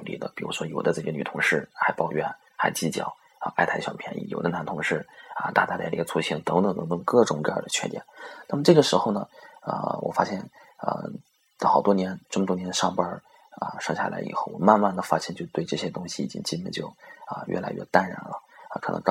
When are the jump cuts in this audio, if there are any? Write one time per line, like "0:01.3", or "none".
none